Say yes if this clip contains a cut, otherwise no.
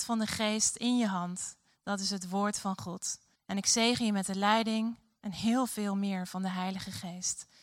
yes